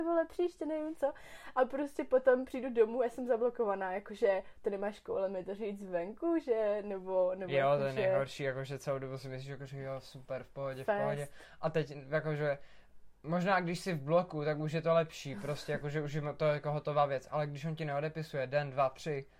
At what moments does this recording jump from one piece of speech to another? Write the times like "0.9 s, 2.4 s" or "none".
none